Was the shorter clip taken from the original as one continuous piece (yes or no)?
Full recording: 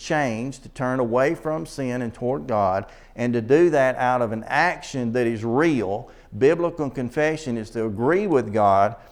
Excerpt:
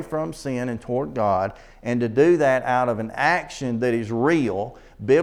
yes